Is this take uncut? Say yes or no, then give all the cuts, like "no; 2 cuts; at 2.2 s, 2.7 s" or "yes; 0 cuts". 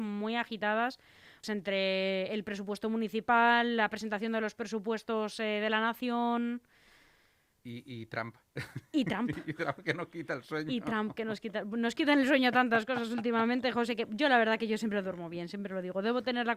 no; 1 cut; at 1.4 s